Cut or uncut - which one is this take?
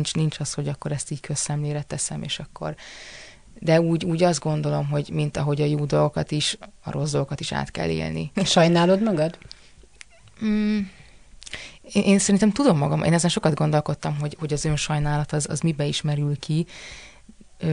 cut